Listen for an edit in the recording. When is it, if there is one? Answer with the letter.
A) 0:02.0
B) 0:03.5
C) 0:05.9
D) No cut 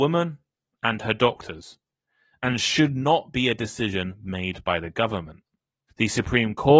C